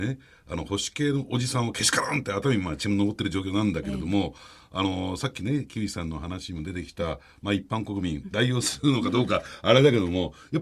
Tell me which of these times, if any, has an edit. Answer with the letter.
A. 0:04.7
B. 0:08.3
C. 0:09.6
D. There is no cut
D